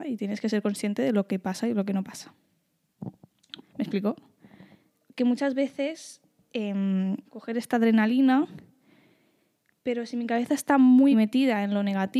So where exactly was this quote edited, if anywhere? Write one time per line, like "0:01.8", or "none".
0:03.6
0:07.2
0:11.1

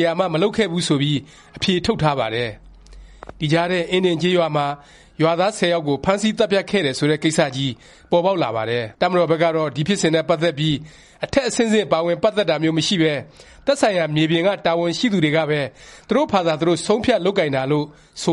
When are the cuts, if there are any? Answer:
0:08.9

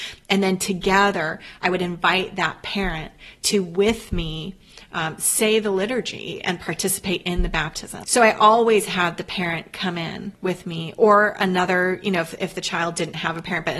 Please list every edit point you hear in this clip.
0:08.0

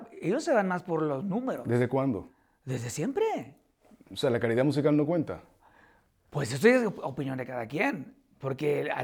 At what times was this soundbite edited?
none

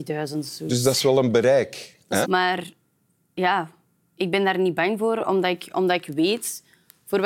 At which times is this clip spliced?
0:02.2

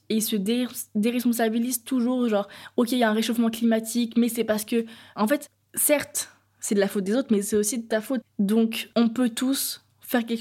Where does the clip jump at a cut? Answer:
0:08.2

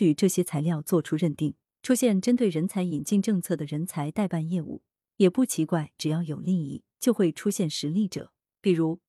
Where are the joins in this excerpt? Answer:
0:01.7

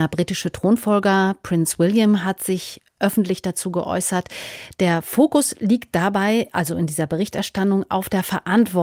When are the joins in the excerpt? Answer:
none

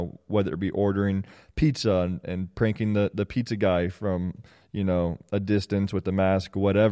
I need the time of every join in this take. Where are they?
none

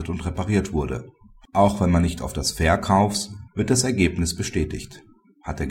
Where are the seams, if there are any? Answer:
0:03.5

